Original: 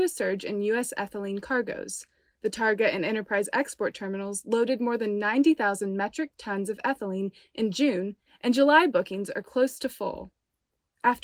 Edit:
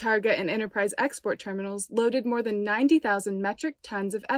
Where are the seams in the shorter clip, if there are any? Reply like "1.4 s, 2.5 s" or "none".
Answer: none